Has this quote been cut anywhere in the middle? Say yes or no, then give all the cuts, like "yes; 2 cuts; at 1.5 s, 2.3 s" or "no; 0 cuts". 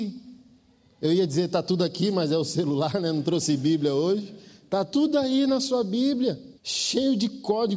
yes; 1 cut; at 6.6 s